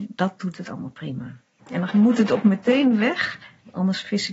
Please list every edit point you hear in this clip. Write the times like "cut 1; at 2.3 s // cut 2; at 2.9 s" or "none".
cut 1; at 1.6 s